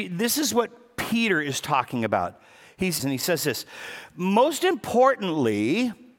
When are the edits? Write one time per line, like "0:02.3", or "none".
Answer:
0:03.0